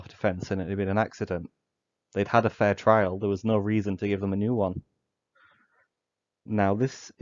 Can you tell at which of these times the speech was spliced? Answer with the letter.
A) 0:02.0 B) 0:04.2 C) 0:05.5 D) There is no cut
D